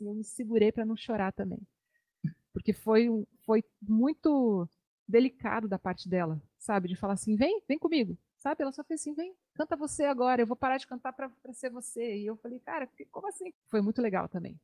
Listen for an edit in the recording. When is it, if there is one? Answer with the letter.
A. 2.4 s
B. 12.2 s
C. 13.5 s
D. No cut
C